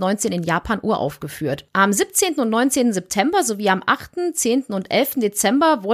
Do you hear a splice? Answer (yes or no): no